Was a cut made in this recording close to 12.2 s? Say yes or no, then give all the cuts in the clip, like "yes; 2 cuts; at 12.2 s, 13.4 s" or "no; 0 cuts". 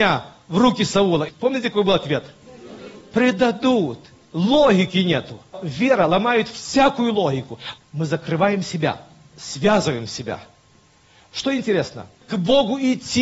yes; 2 cuts; at 7.8 s, 12.2 s